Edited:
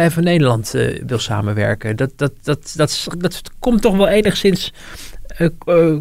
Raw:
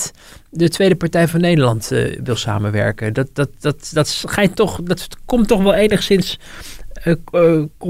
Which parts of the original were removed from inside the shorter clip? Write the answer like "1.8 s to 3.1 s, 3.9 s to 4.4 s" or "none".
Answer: 4.3 s to 4.8 s